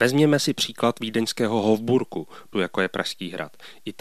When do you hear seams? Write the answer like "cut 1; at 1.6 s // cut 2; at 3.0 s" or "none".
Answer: cut 1; at 2.5 s